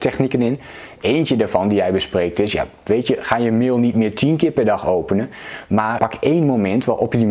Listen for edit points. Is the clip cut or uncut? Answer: cut